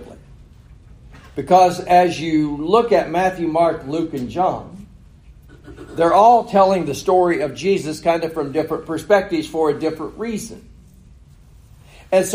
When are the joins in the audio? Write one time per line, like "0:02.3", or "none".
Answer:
none